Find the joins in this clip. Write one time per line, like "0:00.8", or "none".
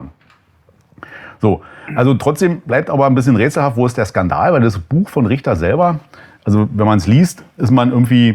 none